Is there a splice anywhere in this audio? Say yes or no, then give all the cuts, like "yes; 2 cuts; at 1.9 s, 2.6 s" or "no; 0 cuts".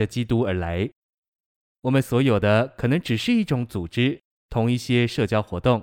yes; 1 cut; at 1.7 s